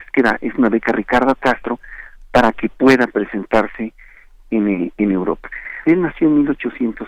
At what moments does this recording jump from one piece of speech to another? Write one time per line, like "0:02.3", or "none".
0:05.9